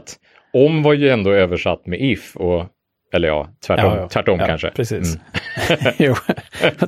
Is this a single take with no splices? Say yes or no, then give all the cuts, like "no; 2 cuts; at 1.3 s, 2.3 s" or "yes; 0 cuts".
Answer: yes; 0 cuts